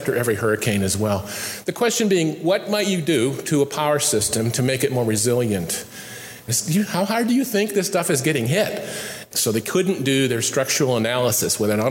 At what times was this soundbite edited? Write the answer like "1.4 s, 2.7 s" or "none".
6.5 s, 9.3 s

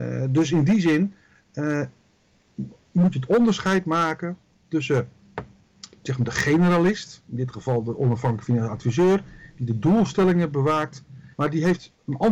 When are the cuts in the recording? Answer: 11.3 s

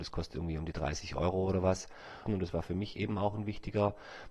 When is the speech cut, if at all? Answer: 2.3 s

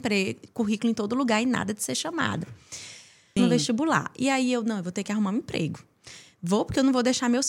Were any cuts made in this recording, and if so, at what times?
3.4 s

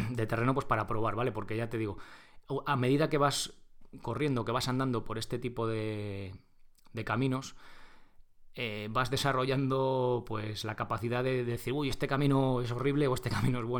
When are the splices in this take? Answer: none

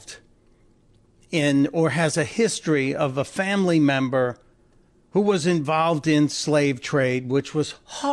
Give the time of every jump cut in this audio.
none

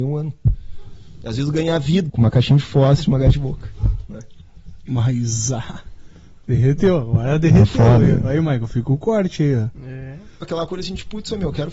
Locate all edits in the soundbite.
2.1 s, 10.4 s

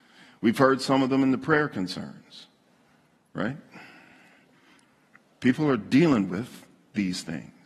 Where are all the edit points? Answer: none

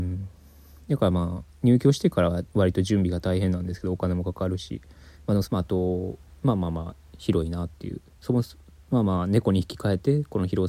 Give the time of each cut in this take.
5.4 s

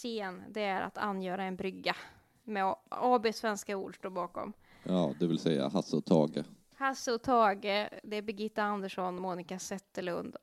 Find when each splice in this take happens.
none

